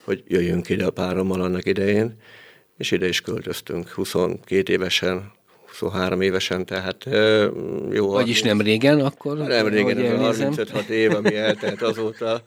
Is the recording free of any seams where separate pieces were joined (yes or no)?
yes